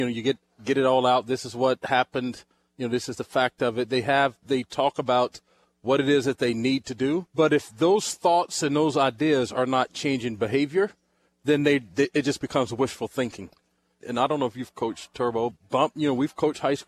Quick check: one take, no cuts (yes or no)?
no